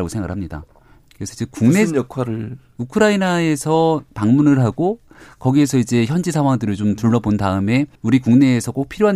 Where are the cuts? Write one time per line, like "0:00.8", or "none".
0:01.0
0:08.0

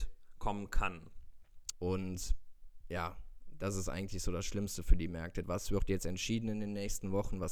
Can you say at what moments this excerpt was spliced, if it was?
0:01.7
0:05.4

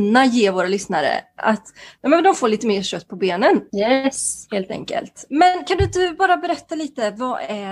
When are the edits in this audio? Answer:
0:02.0
0:03.7

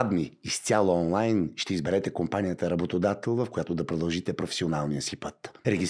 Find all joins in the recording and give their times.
none

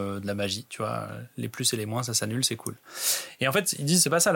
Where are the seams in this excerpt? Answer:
none

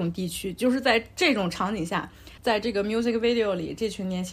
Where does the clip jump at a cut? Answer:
0:02.4

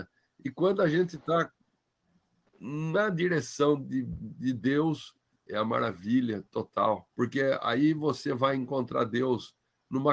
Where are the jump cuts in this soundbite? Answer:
0:05.4
0:07.1

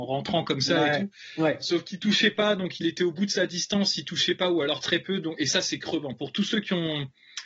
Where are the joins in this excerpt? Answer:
none

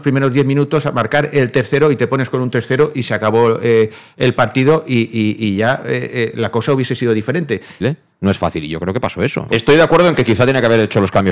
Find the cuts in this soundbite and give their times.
0:07.8
0:09.5

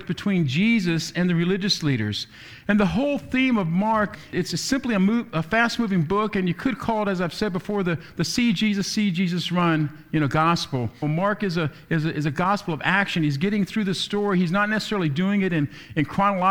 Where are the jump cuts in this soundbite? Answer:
0:11.0

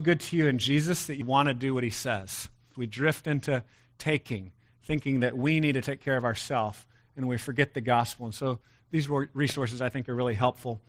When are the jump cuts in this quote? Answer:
0:01.2
0:02.7

